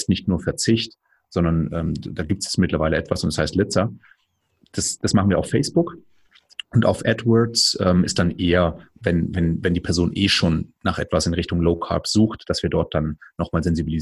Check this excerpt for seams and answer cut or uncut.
uncut